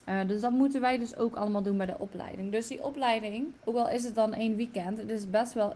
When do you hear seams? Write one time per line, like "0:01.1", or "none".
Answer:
0:03.6